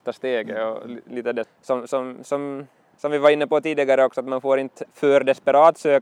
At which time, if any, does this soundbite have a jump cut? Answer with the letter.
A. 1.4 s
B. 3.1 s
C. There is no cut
A